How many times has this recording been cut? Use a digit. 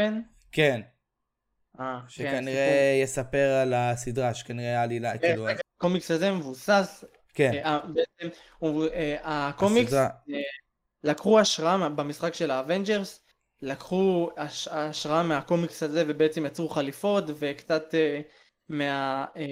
1